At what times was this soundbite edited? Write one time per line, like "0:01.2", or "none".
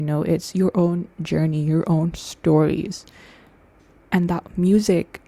none